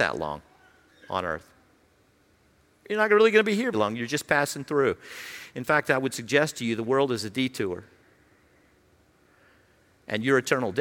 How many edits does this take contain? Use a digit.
1